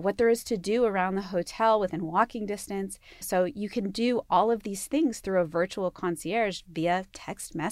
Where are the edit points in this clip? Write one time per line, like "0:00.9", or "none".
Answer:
0:03.2